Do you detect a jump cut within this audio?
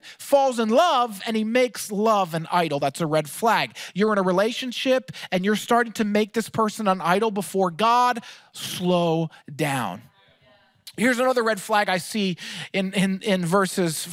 no; 0 cuts

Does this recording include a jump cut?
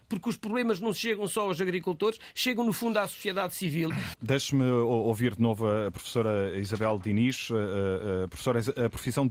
yes; 1 cut; at 4.1 s

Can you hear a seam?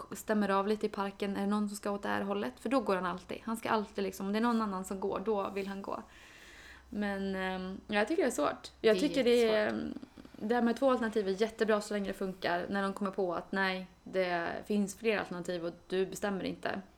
no; 0 cuts

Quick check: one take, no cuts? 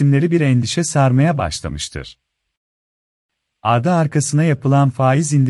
yes; 0 cuts

